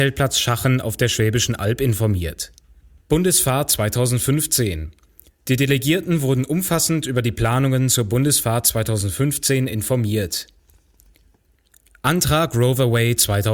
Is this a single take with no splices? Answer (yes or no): no